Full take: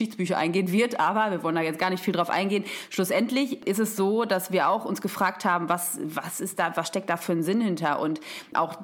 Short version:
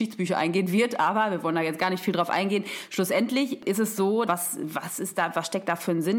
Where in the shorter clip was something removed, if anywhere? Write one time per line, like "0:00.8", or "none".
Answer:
0:04.3